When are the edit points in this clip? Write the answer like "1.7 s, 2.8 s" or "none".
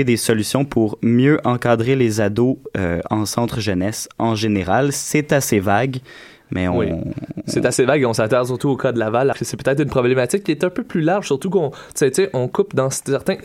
9.3 s